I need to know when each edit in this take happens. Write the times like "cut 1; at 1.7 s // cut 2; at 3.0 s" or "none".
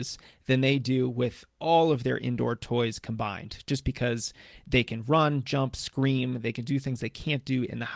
none